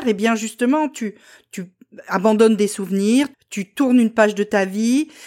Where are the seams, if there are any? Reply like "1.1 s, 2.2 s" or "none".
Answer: 3.3 s

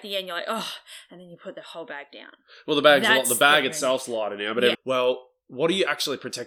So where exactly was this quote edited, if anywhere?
4.7 s

